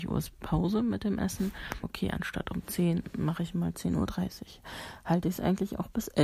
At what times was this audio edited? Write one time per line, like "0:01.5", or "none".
0:01.8